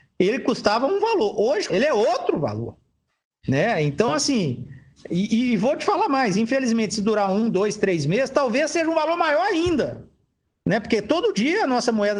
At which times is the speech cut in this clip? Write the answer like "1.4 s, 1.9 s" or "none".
1.7 s